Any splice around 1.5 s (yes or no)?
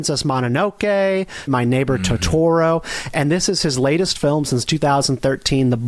yes